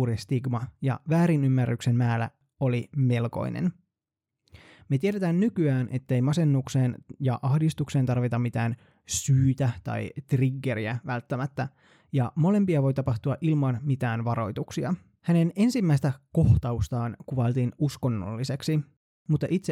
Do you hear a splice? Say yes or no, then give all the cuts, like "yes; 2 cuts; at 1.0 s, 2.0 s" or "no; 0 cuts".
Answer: yes; 1 cut; at 15.2 s